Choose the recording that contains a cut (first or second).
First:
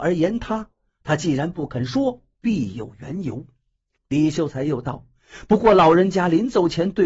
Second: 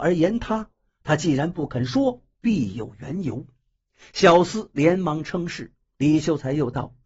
first